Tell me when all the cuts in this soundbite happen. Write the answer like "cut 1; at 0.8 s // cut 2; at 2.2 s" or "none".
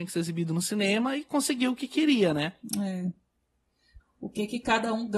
cut 1; at 4.0 s